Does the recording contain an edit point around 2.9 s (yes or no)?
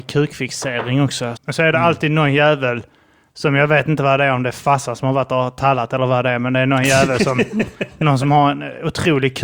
no